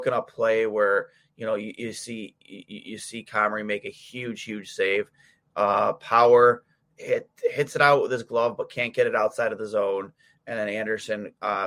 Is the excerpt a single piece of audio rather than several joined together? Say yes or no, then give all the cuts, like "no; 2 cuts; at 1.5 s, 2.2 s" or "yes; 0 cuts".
yes; 0 cuts